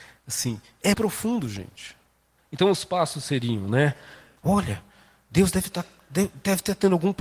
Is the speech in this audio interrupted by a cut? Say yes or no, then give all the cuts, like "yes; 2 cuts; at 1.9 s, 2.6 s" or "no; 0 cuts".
yes; 3 cuts; at 0.9 s, 2.4 s, 4.4 s